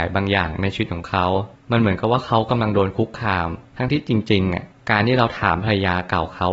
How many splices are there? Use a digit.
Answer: 1